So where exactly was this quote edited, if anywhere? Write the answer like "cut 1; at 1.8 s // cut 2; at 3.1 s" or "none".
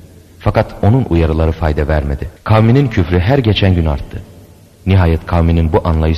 cut 1; at 2.4 s